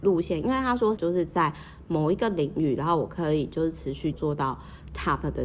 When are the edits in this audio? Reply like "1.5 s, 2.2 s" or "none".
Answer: 1.0 s, 4.1 s